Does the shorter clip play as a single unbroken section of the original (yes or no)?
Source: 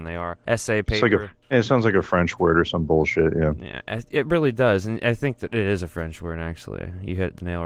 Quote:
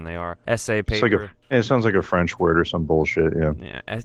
yes